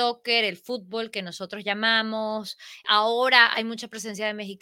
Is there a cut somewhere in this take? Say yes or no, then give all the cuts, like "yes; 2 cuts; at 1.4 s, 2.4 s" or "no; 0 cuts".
no; 0 cuts